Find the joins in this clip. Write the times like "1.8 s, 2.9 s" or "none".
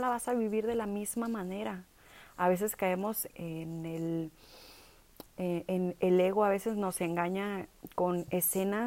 3.3 s